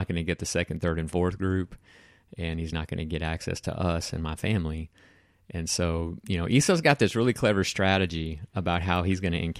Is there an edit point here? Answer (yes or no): yes